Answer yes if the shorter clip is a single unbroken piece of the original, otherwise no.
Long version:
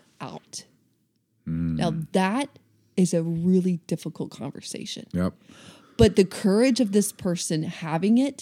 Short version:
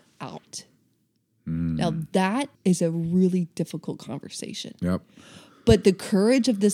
no